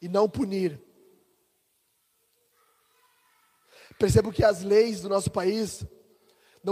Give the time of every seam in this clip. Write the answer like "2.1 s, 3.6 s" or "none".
none